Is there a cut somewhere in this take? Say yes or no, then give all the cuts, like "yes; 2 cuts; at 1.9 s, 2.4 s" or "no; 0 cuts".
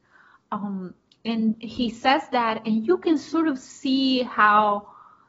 yes; 1 cut; at 1.5 s